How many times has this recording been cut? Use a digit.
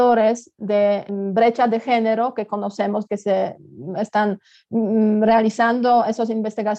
2